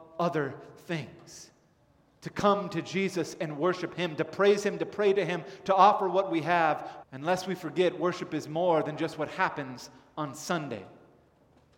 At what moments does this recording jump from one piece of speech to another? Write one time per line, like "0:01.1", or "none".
0:07.0